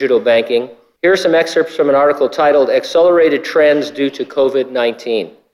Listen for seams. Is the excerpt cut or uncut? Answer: cut